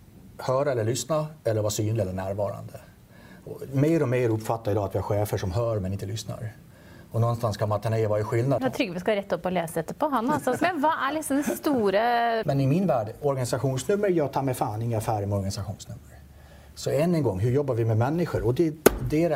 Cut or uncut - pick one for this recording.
cut